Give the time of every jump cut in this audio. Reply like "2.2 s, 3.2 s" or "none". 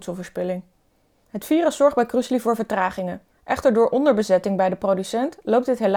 3.4 s